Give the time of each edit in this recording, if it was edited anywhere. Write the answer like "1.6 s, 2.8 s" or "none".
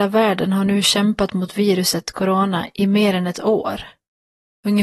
none